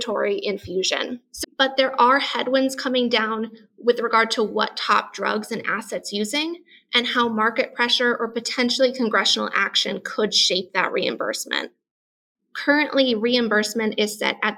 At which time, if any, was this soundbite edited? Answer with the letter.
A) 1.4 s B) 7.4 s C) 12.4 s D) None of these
A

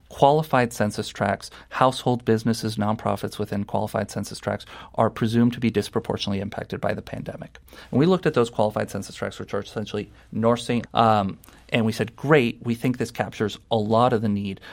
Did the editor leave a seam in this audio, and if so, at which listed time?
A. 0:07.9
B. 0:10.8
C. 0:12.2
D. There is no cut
B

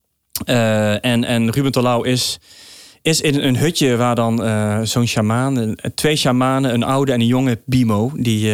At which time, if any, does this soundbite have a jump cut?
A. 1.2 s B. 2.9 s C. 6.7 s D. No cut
D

